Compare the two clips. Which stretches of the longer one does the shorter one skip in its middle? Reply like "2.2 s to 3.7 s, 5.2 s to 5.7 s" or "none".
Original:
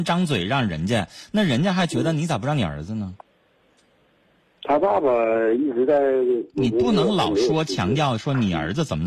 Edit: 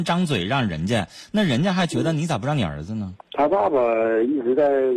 3.2 s to 4.6 s

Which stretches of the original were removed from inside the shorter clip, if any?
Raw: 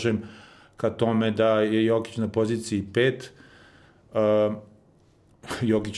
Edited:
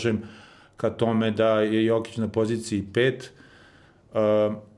none

